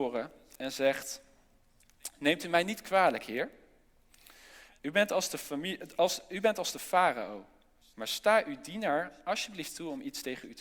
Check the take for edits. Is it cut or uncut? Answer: uncut